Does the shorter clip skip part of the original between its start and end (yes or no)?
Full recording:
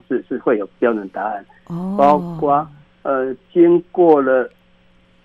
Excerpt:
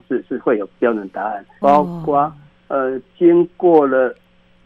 yes